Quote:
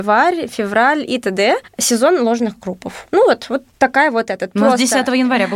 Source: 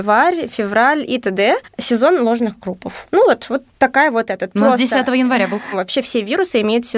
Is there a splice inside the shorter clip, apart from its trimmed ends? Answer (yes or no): no